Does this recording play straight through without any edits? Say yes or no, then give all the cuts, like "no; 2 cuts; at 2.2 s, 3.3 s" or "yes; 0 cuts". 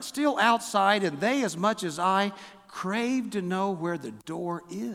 yes; 0 cuts